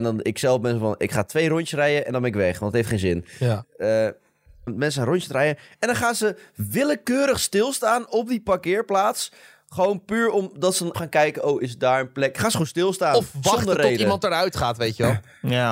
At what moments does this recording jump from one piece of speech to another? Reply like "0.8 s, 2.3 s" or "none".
4.7 s, 10.9 s